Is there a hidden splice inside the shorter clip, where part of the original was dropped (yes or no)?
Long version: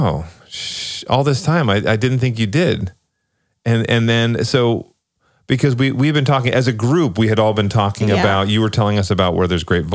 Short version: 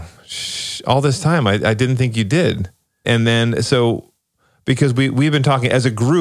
yes